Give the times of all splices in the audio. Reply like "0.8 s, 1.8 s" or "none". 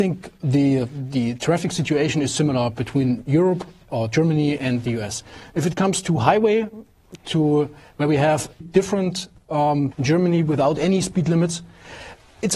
8.6 s, 9.9 s